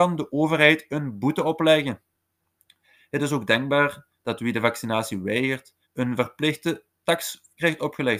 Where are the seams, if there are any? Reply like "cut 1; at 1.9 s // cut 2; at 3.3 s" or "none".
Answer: cut 1; at 5.8 s